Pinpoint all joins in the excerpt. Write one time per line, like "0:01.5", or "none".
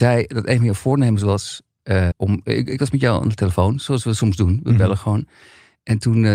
0:02.1